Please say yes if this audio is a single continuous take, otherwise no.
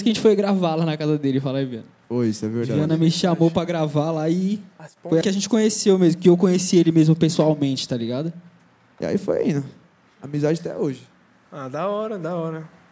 no